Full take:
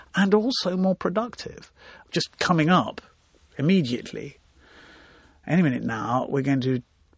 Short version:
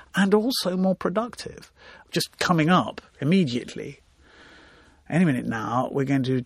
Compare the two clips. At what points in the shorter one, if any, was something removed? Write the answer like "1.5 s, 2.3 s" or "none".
3.1 s